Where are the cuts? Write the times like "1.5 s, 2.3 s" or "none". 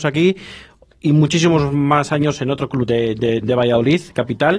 3.4 s